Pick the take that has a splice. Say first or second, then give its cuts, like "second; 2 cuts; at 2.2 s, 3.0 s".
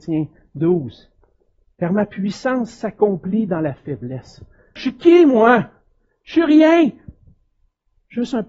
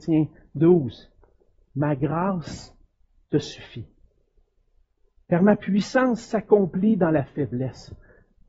first; 2 cuts; at 1.6 s, 4.8 s